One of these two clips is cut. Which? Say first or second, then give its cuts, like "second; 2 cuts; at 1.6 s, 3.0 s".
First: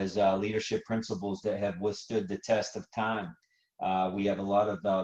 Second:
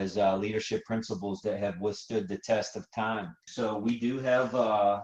second; 1 cut; at 3.5 s